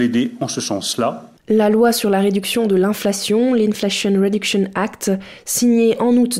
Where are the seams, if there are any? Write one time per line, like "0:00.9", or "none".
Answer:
none